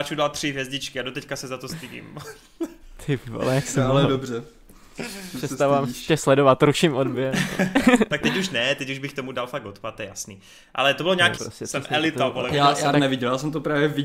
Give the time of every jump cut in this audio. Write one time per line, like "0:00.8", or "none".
0:11.4
0:12.9

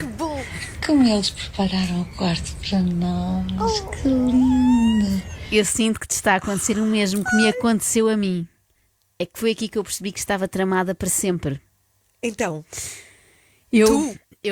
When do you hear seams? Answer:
none

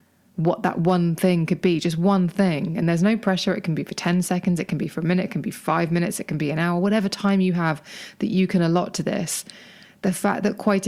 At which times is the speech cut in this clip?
none

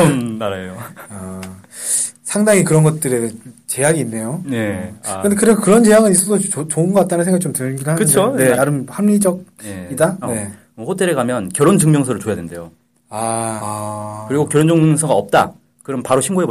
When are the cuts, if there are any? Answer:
0:08.5
0:10.2
0:13.6

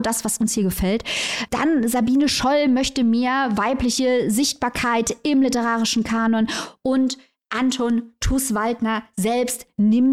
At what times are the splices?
none

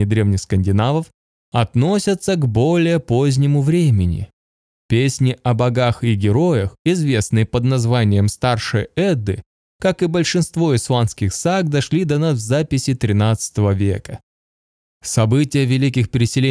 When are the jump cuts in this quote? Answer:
none

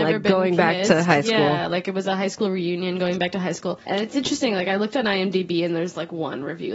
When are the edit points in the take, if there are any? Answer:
0:03.8

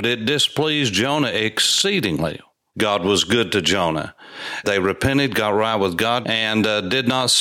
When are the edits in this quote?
0:02.7
0:04.6
0:06.2

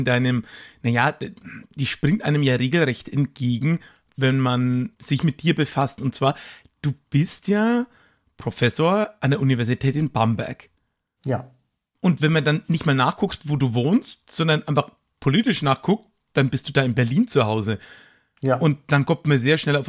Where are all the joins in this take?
none

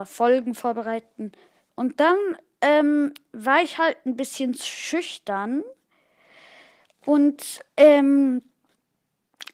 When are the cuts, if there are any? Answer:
0:01.7

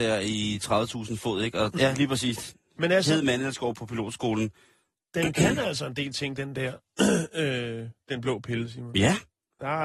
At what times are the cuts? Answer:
0:01.8

